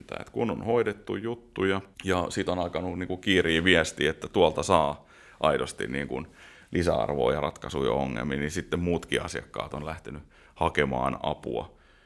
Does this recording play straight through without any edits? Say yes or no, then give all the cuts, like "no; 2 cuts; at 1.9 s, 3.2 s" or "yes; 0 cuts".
no; 1 cut; at 1.9 s